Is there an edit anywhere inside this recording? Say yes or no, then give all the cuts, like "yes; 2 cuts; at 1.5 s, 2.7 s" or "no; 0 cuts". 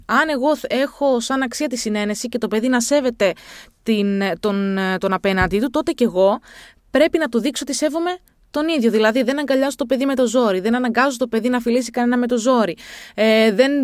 no; 0 cuts